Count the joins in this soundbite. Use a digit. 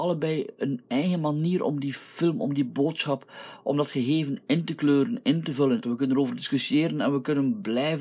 1